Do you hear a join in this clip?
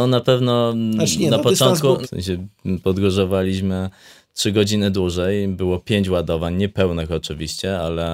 yes; 1 cut; at 2.0 s

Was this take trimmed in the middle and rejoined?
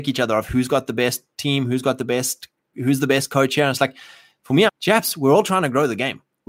yes; 1 cut; at 4.7 s

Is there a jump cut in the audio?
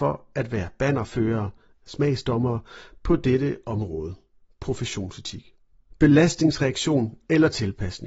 yes; 1 cut; at 5.9 s

